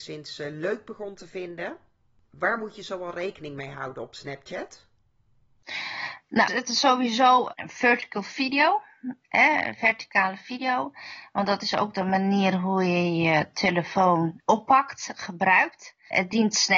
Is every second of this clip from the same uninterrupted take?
no; 1 cut; at 6.5 s

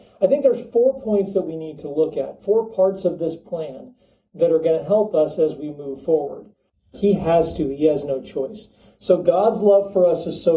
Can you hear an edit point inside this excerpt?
yes; 1 cut; at 6.9 s

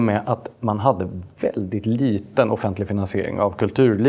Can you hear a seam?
no; 0 cuts

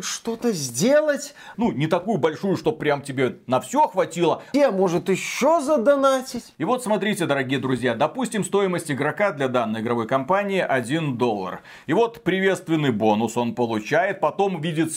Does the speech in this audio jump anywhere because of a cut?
yes; 2 cuts; at 1.5 s, 4.5 s

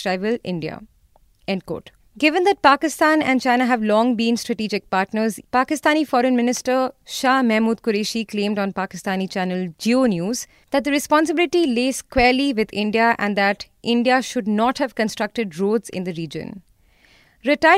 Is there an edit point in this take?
yes; 1 cut; at 5.4 s

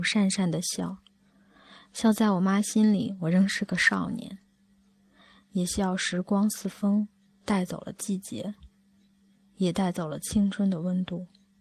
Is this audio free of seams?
yes; 0 cuts

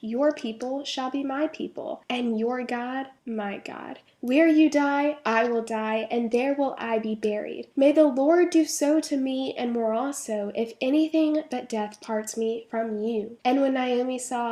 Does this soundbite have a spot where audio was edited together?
no; 0 cuts

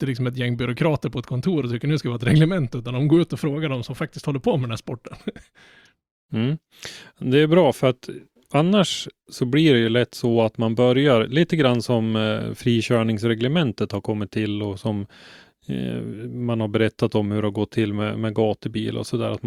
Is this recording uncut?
yes; 0 cuts

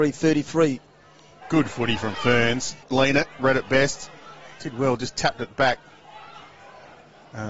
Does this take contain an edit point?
yes; 2 cuts; at 1.4 s, 2.8 s

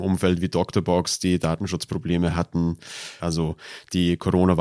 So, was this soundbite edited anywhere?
yes; 1 cut; at 3.2 s

